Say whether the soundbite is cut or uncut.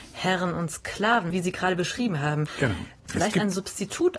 cut